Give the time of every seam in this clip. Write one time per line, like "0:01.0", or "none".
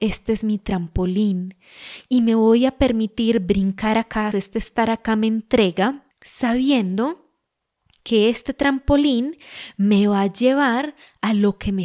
0:04.3
0:06.1